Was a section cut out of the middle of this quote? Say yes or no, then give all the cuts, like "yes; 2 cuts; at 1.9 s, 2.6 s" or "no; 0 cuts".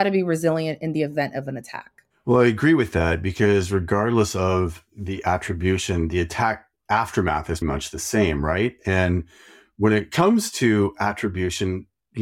yes; 1 cut; at 7.6 s